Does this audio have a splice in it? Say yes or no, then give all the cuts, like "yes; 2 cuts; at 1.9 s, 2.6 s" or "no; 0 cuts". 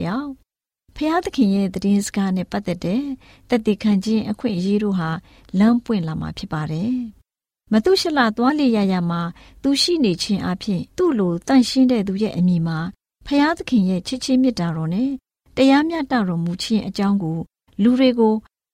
yes; 1 cut; at 10.9 s